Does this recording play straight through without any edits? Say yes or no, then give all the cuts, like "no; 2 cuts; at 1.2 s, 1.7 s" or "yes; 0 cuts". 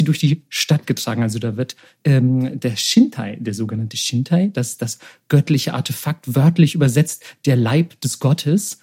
yes; 0 cuts